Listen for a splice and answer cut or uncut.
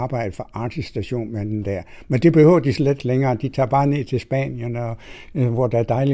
uncut